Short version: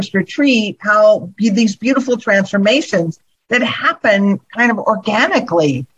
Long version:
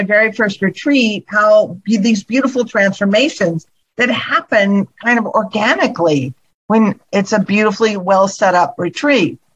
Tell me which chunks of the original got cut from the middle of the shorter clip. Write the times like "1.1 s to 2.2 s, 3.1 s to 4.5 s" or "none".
none

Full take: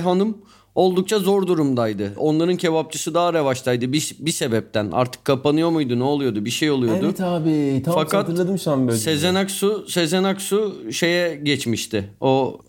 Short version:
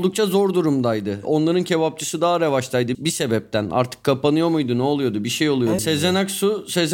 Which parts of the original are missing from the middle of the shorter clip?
3.9 s to 4.2 s, 7.0 s to 9.0 s

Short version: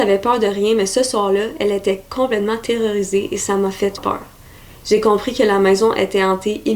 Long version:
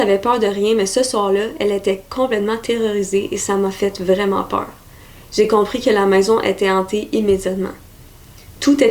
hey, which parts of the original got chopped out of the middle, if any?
4.0 s to 4.4 s

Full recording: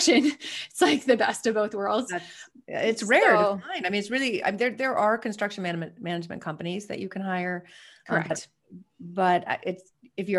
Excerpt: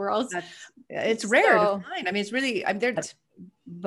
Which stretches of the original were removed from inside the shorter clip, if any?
4.7 s to 8.3 s

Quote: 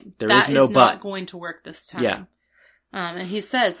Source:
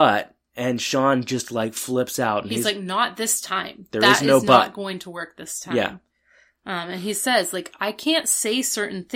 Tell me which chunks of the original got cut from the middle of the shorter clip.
none

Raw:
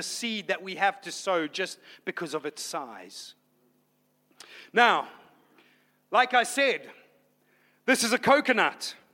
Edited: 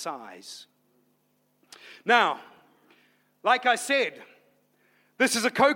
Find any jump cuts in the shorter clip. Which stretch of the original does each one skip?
none

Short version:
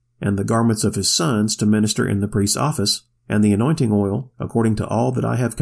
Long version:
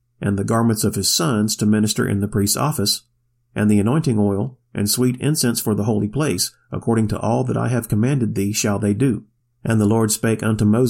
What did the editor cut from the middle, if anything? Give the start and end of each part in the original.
3.2 s to 3.4 s, 4.6 s to 6.7 s

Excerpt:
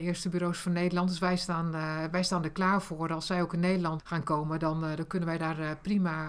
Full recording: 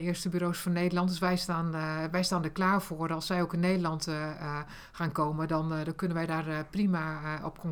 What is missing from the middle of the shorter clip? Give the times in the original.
4.0 s to 4.9 s

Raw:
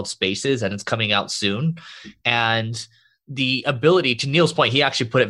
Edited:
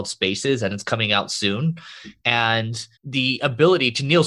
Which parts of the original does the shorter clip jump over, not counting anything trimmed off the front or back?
3.0 s to 3.2 s

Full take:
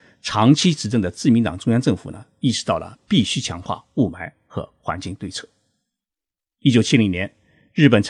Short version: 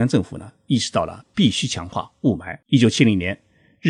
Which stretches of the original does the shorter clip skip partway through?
4.4 s to 6.6 s

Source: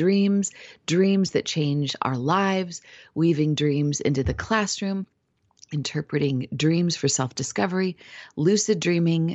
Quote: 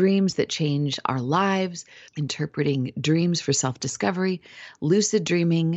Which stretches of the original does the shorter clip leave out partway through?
3.0 s to 5.6 s

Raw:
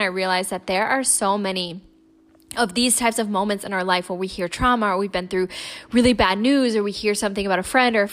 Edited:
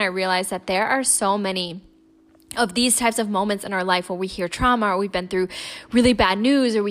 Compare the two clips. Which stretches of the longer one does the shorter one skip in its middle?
none

